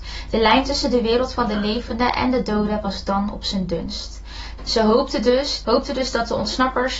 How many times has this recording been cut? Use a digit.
2